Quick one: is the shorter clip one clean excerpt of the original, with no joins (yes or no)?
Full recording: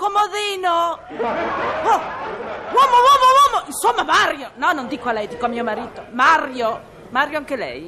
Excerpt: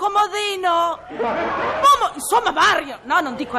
no